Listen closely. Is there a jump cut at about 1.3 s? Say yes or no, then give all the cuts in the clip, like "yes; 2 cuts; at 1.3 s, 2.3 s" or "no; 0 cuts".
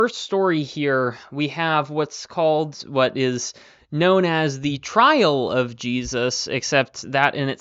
no; 0 cuts